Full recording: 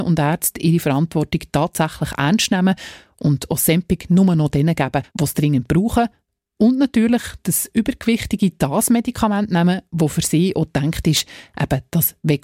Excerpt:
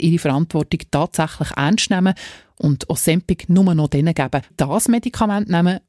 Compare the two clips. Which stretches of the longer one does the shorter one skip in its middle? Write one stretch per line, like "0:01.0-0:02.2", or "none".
0:05.1-0:08.5